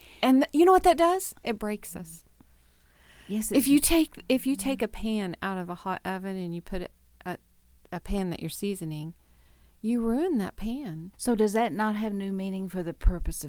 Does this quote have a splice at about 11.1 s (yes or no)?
yes